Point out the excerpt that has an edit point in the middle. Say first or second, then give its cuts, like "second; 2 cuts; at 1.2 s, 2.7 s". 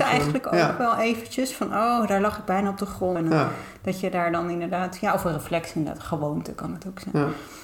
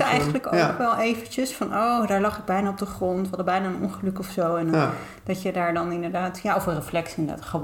first; 1 cut; at 3.2 s